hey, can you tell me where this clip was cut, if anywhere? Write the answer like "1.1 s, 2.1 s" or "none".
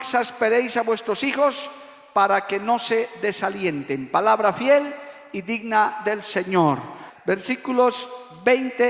7.1 s